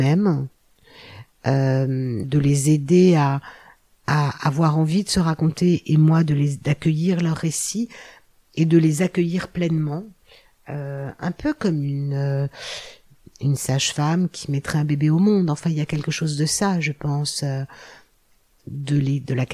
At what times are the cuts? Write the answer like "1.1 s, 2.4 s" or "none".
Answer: 2.2 s